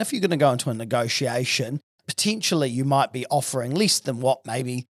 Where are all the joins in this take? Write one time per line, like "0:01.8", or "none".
none